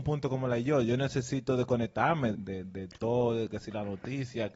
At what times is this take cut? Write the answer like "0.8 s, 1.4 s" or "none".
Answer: 2.3 s